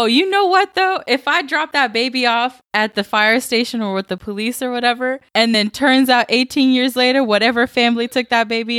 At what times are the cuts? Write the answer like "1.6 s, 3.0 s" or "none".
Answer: none